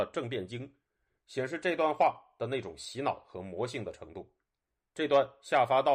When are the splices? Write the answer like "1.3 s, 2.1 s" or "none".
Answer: 4.9 s